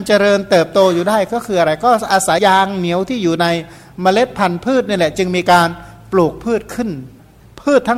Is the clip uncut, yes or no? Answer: no